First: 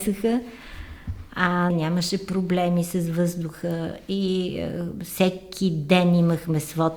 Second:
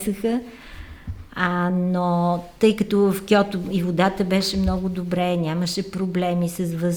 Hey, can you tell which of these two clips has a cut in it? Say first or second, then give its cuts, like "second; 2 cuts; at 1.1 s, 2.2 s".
first; 1 cut; at 1.7 s